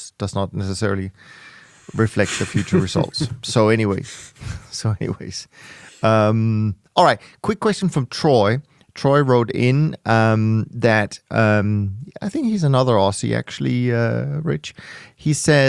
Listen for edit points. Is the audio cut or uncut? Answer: uncut